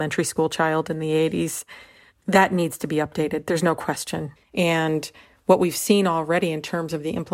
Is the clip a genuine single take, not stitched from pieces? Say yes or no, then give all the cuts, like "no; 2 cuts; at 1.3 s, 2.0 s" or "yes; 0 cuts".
no; 1 cut; at 4.4 s